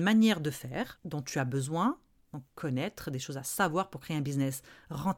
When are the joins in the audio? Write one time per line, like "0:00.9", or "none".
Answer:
0:01.0